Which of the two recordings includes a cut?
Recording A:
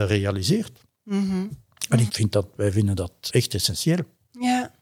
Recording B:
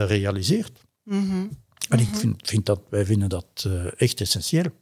A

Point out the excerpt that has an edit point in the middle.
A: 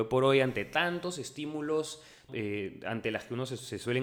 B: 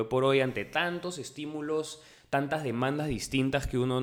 A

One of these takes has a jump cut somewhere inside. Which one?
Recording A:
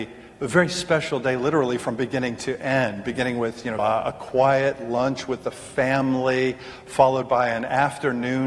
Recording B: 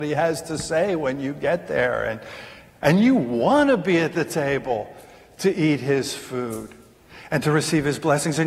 A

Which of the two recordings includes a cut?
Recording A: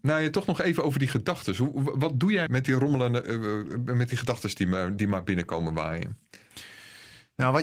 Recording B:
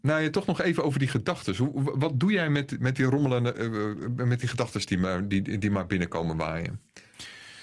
A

